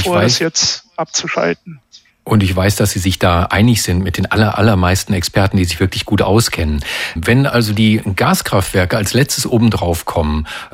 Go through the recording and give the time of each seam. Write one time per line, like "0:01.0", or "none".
0:07.2